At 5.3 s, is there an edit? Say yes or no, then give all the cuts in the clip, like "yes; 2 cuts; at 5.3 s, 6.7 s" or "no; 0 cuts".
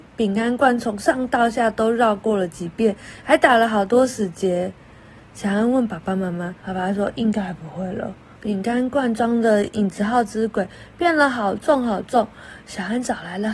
no; 2 cuts; at 6.6 s, 8.4 s